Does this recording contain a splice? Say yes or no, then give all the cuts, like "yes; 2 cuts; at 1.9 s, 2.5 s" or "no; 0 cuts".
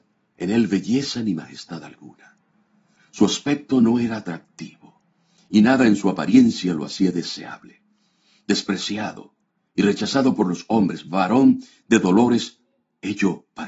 no; 0 cuts